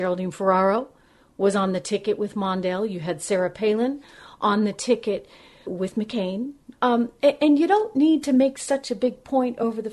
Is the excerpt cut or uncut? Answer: cut